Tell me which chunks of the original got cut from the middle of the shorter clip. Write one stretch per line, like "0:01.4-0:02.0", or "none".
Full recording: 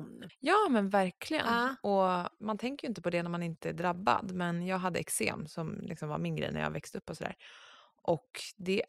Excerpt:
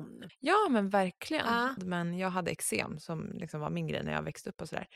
0:01.8-0:04.3